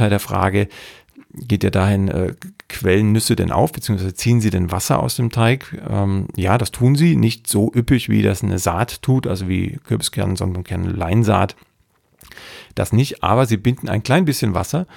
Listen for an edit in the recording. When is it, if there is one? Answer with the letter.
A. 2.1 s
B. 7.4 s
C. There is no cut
C